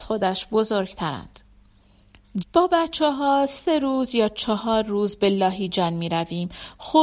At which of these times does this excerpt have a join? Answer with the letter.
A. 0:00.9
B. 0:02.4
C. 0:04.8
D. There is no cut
B